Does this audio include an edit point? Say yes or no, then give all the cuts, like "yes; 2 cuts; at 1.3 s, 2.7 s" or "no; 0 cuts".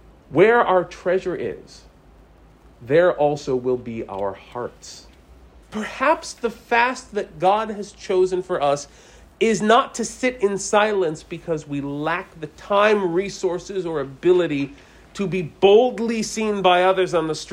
yes; 1 cut; at 5.6 s